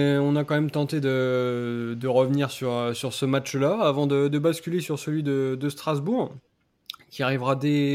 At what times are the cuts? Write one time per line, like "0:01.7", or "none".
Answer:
none